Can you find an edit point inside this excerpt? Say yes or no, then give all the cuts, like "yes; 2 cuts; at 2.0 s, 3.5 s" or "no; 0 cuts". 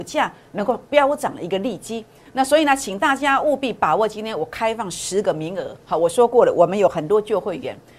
yes; 1 cut; at 2.3 s